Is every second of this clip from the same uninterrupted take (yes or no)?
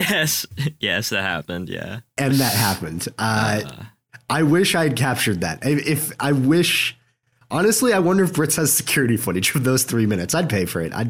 no